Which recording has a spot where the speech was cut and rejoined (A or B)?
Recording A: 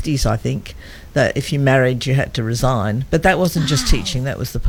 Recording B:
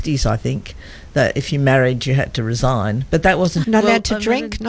B